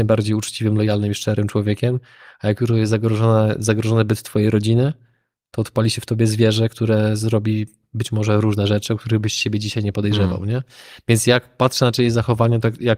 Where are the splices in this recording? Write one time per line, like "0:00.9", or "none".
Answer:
none